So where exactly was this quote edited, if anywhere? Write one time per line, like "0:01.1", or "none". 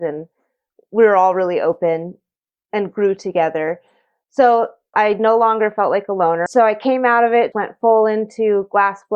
0:04.9
0:06.5
0:07.5